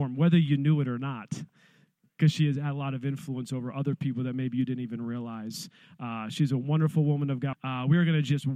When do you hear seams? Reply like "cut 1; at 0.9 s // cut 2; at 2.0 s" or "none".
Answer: cut 1; at 7.5 s